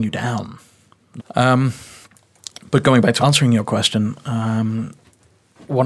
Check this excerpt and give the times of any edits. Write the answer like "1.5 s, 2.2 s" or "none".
1.2 s, 3.2 s